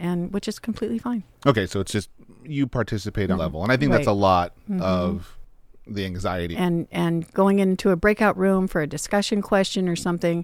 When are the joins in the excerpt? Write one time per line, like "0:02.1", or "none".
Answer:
0:03.3
0:06.5